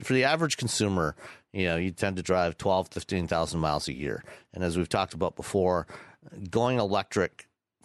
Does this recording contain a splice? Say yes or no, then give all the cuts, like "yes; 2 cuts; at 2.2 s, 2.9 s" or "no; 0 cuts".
no; 0 cuts